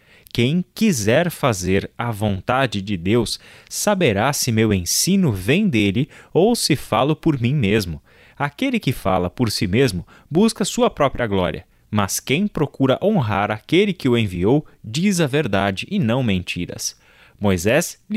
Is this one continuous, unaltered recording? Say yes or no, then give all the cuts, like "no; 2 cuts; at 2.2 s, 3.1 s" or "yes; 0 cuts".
yes; 0 cuts